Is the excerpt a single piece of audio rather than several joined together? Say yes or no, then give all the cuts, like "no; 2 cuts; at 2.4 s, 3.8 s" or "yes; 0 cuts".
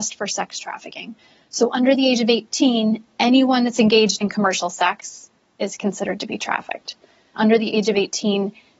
no; 1 cut; at 7.3 s